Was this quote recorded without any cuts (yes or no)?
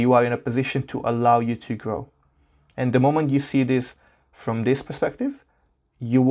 yes